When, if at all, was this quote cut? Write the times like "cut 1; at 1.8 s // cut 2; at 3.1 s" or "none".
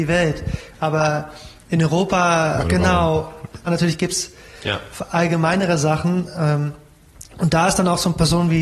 cut 1; at 2.6 s // cut 2; at 3.7 s